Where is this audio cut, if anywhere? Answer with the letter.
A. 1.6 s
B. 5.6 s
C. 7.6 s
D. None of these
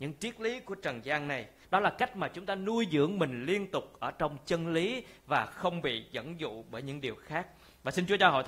A